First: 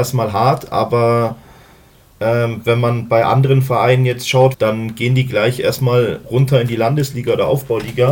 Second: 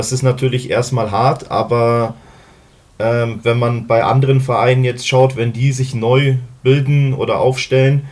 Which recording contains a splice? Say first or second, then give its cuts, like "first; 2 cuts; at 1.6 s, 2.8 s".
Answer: first; 1 cut; at 4.5 s